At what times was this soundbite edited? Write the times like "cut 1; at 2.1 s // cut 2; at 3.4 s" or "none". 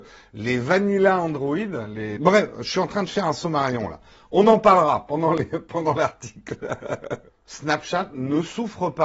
cut 1; at 2.2 s // cut 2; at 7.3 s